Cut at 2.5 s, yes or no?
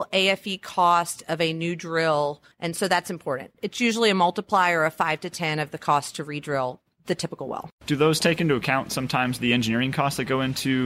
yes